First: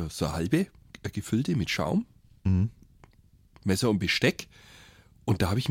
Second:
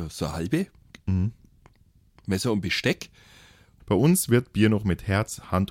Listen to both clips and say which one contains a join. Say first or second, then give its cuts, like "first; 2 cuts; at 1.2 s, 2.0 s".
second; 2 cuts; at 1.0 s, 3.8 s